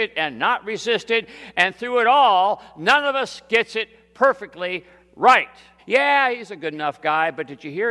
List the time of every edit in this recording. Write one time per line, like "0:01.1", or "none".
0:05.8